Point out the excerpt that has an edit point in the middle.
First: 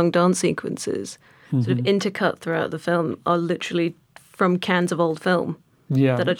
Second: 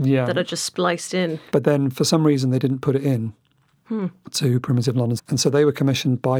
second; 2 cuts; at 1.5 s, 5.2 s

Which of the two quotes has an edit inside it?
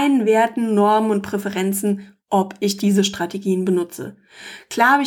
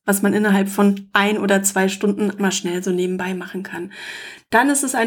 second; 1 cut; at 2.4 s

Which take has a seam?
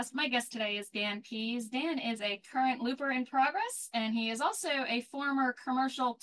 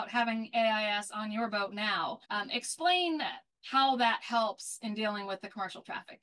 second; 1 cut; at 2.2 s

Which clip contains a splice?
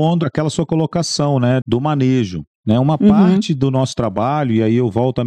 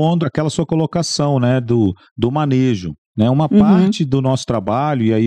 first; 1 cut; at 1.6 s

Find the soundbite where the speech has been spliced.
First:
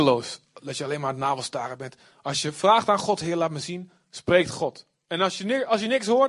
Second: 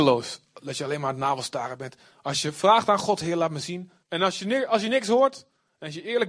second; 1 cut; at 4.0 s

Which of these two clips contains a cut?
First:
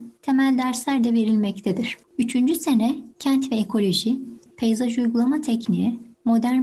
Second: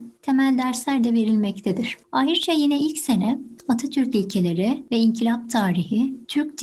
first; 2 cuts; at 2.1 s, 4.5 s

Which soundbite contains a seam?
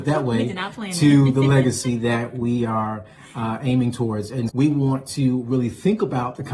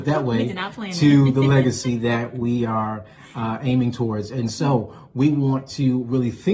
first; 1 cut; at 4.5 s

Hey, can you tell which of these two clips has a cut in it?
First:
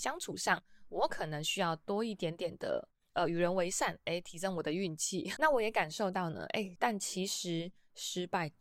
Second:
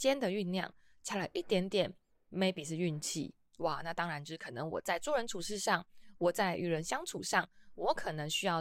first; 2 cuts; at 5.4 s, 6.8 s

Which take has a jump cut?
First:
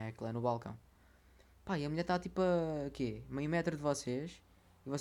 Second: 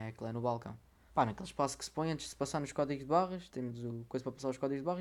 second; 2 cuts; at 1.1 s, 3.5 s

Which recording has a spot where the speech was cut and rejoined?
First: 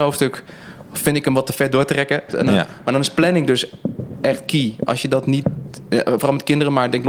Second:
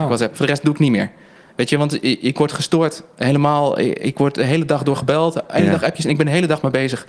first; 1 cut; at 2.3 s

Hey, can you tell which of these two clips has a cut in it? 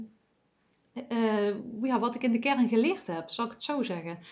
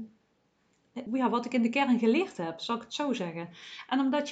second; 1 cut; at 1.1 s

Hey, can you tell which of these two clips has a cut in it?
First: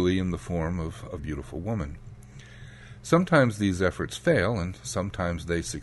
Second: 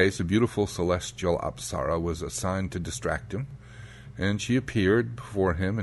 first; 1 cut; at 1.2 s

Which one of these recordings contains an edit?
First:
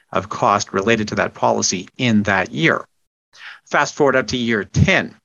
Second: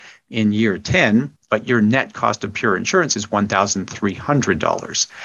second; 1 cut; at 1.4 s

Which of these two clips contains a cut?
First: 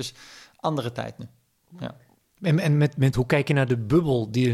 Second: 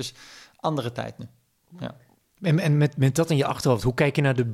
first; 1 cut; at 3.1 s

